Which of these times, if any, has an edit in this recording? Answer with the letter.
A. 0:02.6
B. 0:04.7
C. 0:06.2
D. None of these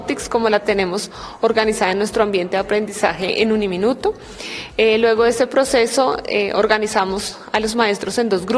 D